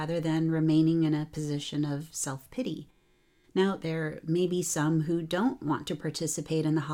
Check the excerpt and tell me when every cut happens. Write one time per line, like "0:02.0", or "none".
0:03.8